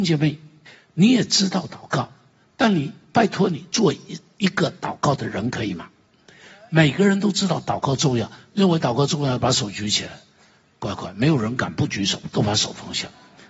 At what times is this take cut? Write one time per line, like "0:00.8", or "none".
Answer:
none